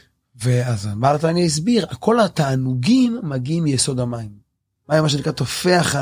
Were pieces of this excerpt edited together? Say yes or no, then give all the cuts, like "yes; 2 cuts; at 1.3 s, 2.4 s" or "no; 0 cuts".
yes; 1 cut; at 4.8 s